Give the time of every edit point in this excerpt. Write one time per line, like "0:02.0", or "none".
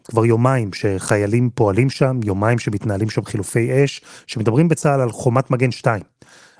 none